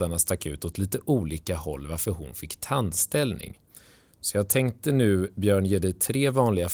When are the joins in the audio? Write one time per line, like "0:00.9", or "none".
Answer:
none